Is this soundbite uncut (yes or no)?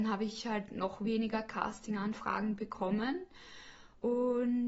yes